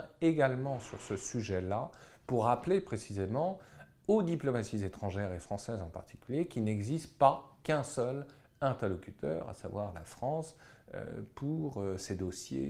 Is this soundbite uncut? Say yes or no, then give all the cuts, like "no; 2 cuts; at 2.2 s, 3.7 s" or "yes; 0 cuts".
yes; 0 cuts